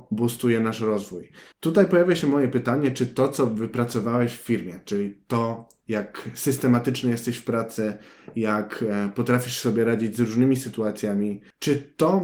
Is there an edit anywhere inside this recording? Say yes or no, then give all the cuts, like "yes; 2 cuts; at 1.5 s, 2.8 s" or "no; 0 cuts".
no; 0 cuts